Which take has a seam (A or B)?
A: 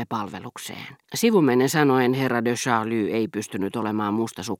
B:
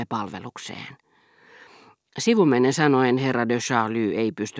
A